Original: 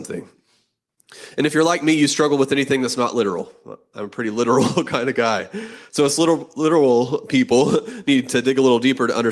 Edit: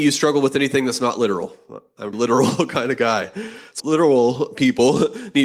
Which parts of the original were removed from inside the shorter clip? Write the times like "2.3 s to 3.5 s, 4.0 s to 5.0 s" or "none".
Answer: 4.1 s to 4.3 s, 6.0 s to 6.5 s